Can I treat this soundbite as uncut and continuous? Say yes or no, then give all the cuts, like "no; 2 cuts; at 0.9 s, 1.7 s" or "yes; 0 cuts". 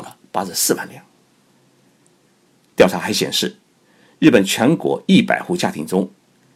yes; 0 cuts